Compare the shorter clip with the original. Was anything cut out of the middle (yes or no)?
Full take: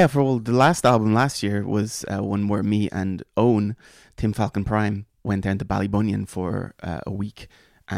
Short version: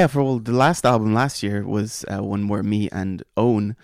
no